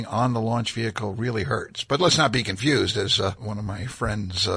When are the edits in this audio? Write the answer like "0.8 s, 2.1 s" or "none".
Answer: 1.9 s